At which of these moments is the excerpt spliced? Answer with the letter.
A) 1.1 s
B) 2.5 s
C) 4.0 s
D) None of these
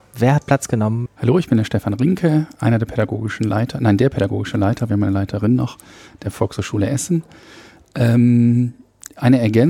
A